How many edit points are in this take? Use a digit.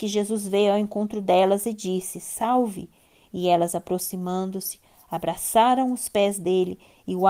0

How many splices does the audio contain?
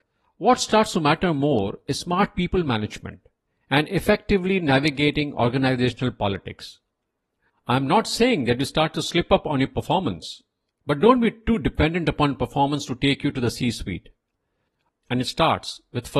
1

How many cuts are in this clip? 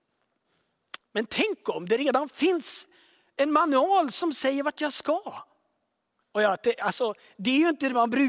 2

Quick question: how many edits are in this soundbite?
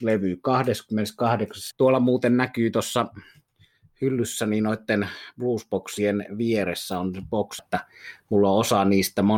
2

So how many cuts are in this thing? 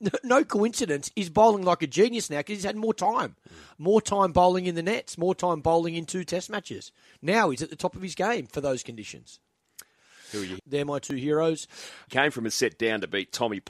2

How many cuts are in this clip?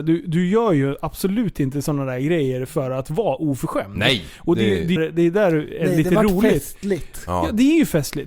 1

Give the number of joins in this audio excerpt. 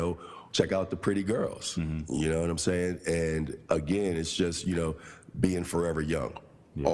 0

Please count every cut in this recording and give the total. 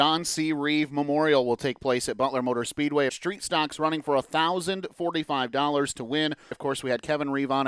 2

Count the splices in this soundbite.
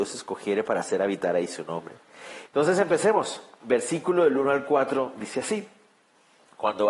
1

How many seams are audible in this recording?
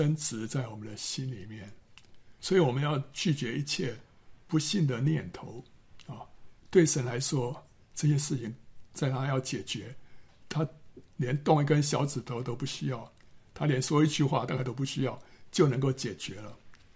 2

